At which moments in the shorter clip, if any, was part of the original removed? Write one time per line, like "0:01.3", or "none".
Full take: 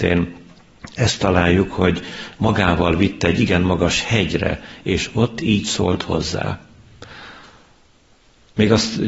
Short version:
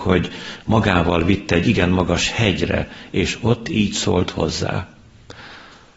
none